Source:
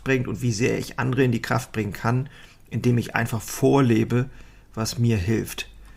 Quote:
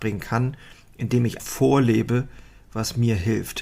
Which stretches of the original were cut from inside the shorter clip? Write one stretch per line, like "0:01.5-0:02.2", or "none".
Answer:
0:03.1-0:03.4